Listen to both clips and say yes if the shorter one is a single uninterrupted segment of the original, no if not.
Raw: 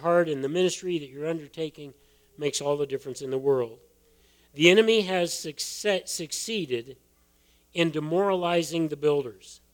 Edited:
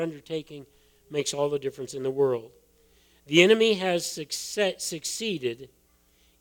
yes